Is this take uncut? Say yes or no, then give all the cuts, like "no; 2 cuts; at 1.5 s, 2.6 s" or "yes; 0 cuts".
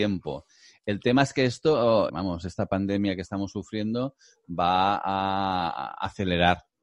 no; 1 cut; at 2.1 s